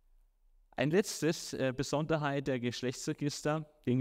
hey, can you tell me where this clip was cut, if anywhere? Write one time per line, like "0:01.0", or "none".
none